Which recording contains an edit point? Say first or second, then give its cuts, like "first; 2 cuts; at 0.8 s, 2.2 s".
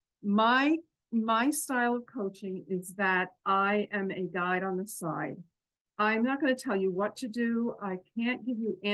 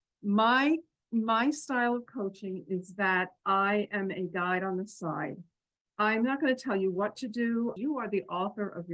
second; 1 cut; at 7.8 s